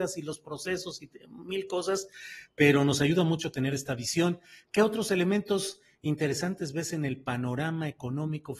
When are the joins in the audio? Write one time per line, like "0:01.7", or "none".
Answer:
none